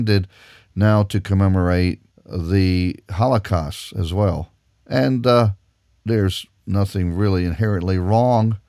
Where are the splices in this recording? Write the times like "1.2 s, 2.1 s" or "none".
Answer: none